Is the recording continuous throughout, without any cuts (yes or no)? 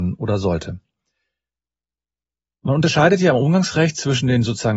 yes